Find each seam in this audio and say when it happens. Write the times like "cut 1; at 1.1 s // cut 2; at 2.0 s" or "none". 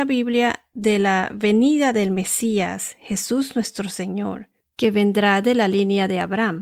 none